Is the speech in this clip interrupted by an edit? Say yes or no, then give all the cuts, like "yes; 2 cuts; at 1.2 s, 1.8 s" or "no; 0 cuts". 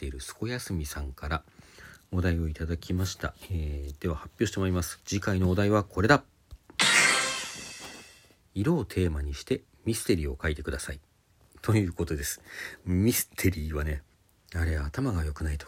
no; 0 cuts